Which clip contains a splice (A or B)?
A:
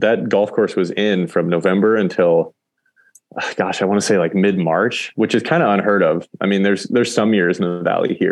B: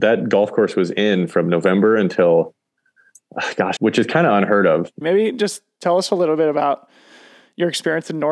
B